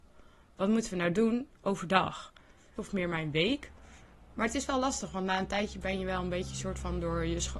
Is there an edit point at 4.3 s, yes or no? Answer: yes